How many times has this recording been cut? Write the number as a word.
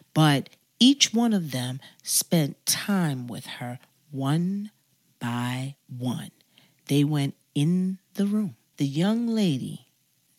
one